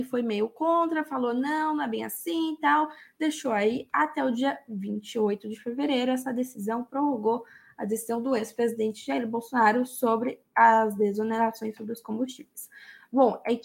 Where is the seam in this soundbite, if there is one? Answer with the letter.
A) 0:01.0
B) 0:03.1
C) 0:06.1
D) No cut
D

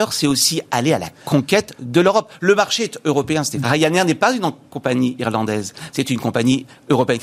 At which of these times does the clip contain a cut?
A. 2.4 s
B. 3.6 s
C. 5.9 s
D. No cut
B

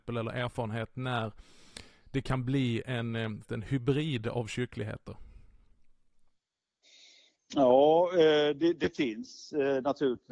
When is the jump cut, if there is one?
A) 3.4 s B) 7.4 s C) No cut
A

